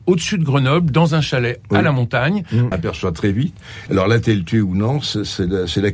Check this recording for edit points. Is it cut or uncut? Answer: cut